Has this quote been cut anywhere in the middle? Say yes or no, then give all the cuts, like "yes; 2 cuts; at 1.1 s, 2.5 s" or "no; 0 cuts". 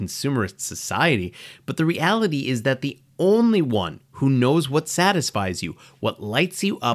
no; 0 cuts